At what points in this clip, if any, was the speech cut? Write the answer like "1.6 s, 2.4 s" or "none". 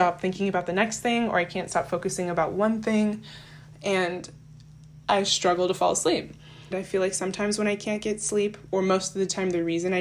6.7 s